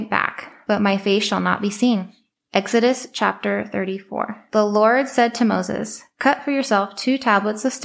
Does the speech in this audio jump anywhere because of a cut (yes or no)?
no